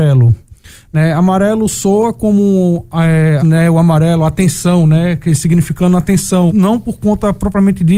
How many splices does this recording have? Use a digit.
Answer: 2